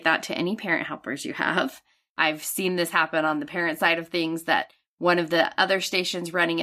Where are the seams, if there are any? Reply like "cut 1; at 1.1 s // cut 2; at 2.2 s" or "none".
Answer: cut 1; at 2.1 s